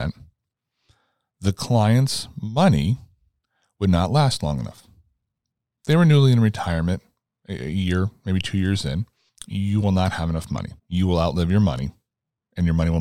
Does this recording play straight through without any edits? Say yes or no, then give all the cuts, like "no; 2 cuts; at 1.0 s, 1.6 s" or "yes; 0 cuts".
no; 2 cuts; at 9.3 s, 10.8 s